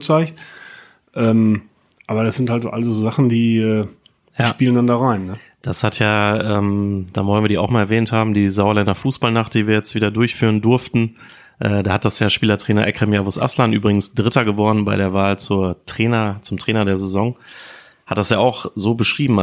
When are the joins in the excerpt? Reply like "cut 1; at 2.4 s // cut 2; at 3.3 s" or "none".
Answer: none